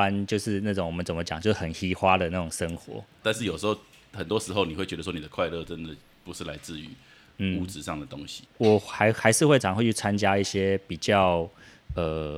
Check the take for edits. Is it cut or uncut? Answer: cut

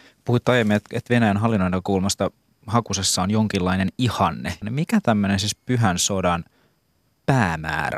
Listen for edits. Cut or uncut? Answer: cut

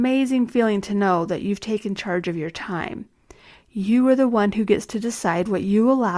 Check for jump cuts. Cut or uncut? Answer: uncut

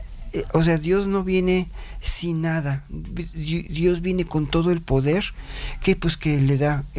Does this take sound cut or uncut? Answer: uncut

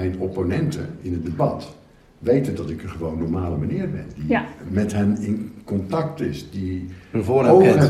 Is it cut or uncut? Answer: uncut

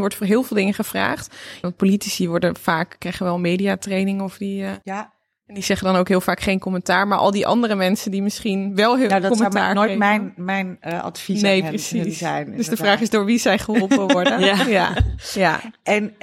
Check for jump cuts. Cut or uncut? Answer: cut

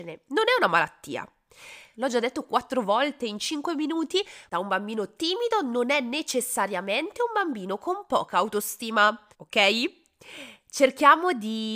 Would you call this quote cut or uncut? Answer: cut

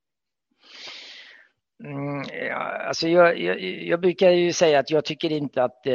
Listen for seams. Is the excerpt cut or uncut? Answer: uncut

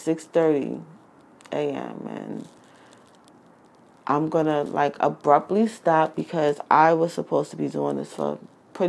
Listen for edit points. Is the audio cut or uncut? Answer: uncut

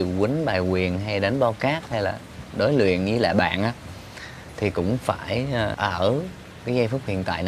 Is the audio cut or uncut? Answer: cut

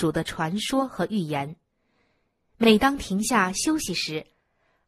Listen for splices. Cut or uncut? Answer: uncut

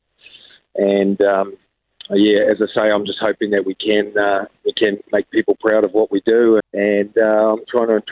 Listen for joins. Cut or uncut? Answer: cut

